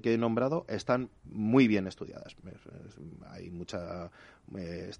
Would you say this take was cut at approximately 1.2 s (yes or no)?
yes